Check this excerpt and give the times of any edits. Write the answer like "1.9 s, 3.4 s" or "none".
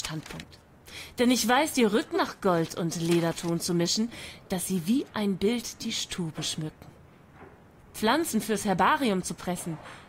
2.1 s, 7.8 s